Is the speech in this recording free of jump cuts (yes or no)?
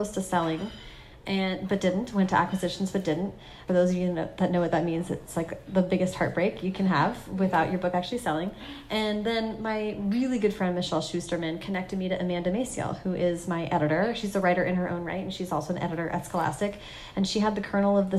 yes